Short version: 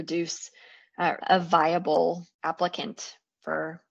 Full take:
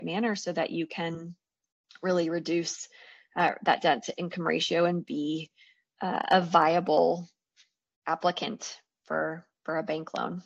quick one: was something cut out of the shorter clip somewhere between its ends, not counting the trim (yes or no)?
yes